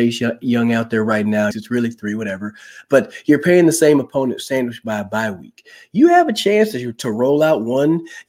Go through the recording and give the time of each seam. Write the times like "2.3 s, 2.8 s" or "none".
1.5 s